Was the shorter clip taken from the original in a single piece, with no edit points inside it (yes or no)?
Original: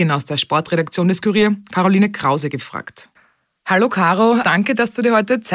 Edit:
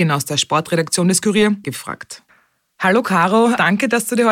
no